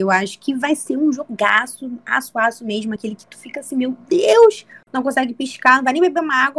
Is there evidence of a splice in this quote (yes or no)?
no